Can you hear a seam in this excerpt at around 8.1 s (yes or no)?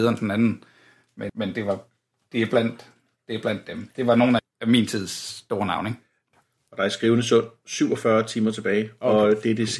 no